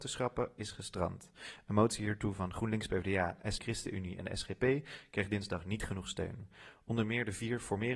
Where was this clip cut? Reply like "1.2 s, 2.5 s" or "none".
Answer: 3.6 s